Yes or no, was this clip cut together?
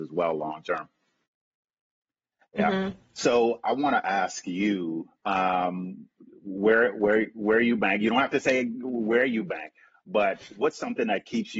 no